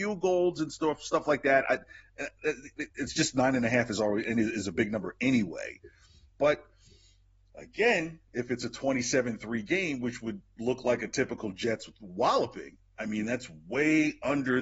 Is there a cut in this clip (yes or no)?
yes